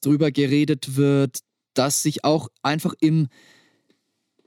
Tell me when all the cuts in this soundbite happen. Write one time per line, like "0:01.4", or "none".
none